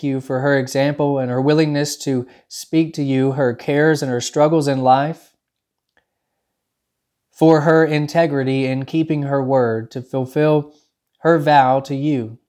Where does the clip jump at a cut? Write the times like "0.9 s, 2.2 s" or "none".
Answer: none

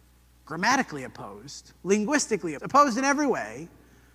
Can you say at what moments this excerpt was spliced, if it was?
2.6 s

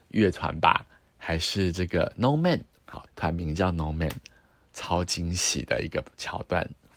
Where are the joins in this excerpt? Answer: 3.1 s

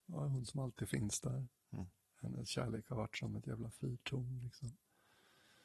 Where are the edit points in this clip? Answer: none

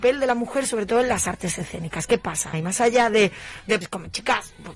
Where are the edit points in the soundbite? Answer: 2.5 s, 3.8 s

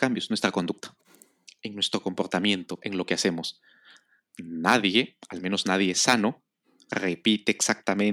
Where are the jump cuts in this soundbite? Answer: none

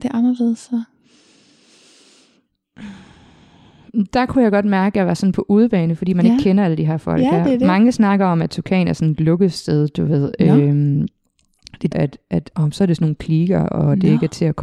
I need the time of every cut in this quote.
11.9 s

